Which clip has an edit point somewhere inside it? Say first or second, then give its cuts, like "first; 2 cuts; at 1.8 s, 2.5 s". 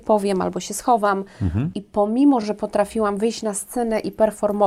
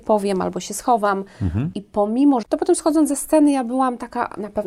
second; 1 cut; at 2.4 s